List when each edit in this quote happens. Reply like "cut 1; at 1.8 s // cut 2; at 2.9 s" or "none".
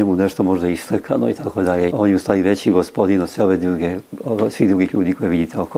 cut 1; at 1.9 s